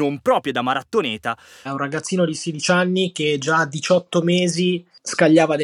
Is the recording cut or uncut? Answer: cut